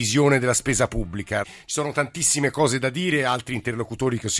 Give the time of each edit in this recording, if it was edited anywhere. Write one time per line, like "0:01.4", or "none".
0:01.4